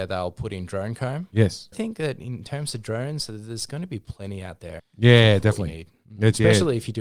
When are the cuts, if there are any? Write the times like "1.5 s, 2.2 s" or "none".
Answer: 1.7 s, 4.8 s